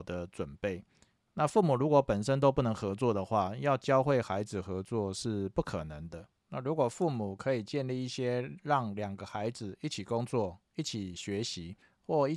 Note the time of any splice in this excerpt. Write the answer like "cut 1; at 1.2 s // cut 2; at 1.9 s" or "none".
cut 1; at 6.5 s